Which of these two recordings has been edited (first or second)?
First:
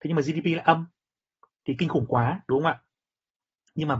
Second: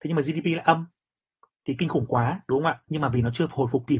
second